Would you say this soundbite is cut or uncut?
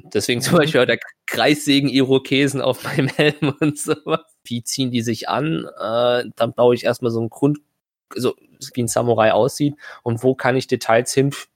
cut